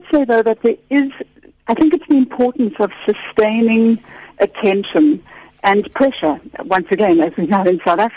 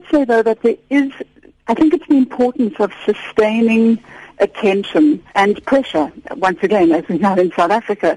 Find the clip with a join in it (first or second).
second